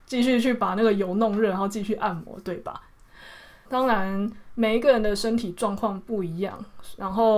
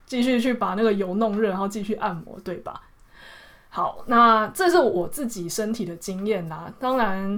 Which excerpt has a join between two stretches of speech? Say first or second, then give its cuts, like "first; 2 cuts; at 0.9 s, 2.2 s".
first; 1 cut; at 3.6 s